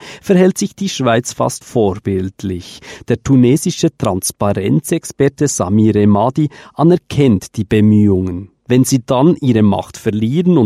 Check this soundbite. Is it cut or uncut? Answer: cut